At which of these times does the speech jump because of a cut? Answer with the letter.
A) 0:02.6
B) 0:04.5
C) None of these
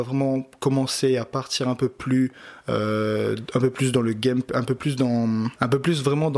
C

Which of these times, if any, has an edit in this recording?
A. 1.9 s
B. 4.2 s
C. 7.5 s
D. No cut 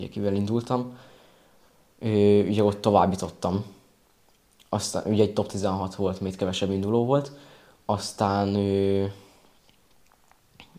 D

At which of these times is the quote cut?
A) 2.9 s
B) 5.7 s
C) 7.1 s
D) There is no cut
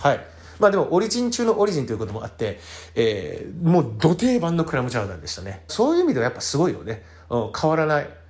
B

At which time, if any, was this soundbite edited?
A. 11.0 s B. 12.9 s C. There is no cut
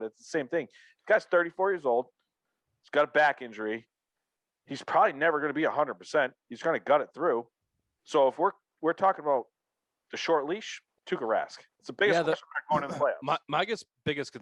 A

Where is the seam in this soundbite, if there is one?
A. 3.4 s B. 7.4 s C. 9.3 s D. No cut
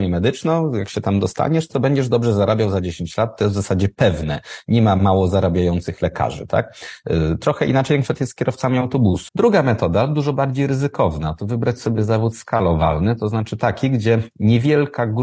C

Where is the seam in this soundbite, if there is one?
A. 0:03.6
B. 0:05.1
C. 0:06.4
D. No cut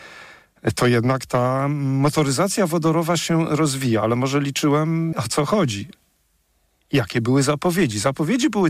B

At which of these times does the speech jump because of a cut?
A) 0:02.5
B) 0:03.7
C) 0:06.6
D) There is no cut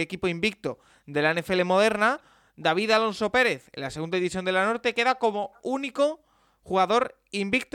D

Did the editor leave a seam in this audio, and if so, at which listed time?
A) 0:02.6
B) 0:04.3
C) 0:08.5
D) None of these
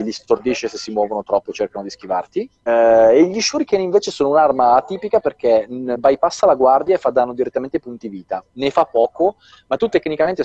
A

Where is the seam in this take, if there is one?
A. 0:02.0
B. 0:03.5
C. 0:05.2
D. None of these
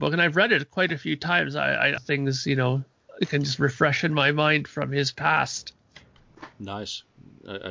A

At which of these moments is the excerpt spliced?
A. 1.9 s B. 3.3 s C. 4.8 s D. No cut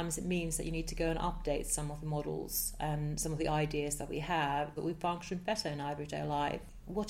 C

